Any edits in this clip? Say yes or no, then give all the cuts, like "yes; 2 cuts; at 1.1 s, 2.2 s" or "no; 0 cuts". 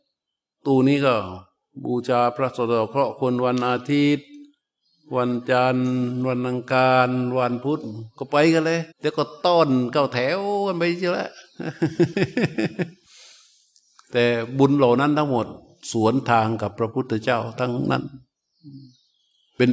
yes; 1 cut; at 8.9 s